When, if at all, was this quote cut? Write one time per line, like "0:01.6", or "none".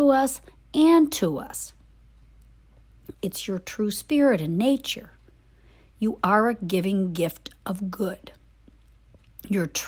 0:03.1